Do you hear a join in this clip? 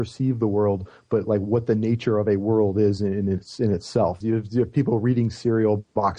yes; 1 cut; at 4.2 s

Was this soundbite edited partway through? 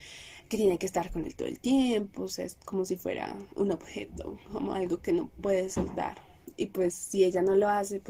no; 0 cuts

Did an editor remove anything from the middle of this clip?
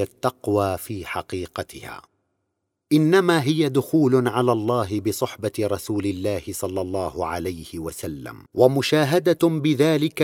yes; 1 cut; at 8.5 s

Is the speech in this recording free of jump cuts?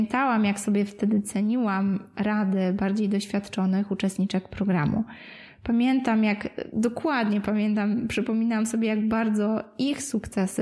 yes; 0 cuts

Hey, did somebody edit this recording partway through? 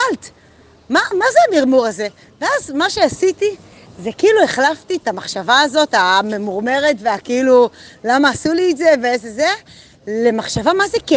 yes; 1 cut; at 1.1 s

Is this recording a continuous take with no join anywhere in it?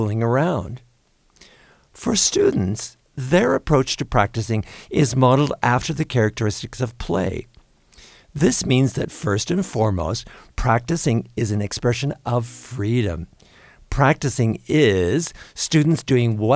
yes; 0 cuts

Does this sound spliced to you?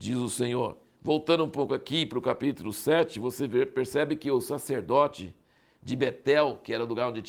no; 0 cuts

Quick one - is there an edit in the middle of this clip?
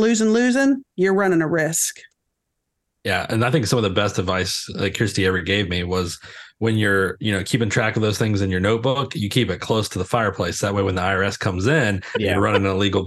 yes; 1 cut; at 0.9 s

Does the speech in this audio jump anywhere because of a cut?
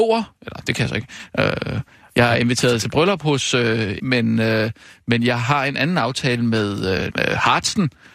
yes; 2 cuts; at 4.0 s, 7.1 s

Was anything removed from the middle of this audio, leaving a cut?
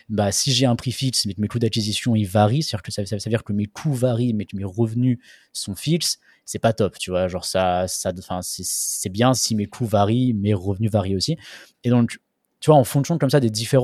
yes; 2 cuts; at 9.3 s, 11.7 s

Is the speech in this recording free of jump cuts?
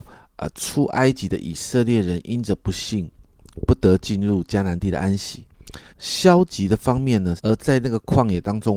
no; 2 cuts; at 5.9 s, 7.4 s

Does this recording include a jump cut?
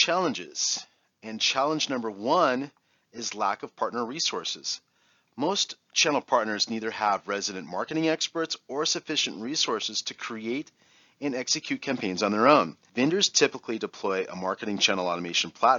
yes; 1 cut; at 12.9 s

